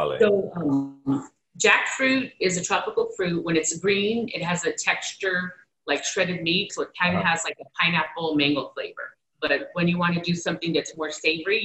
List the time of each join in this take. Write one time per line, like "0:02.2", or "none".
0:06.7
0:09.3